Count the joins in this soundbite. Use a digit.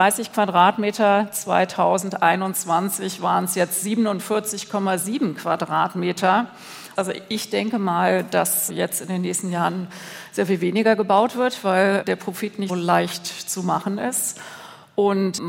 3